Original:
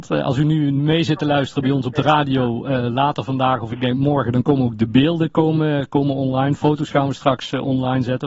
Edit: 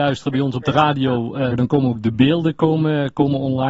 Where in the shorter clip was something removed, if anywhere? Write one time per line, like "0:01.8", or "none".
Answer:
0:01.5